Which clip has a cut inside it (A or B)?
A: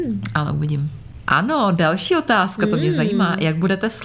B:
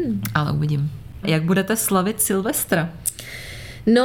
B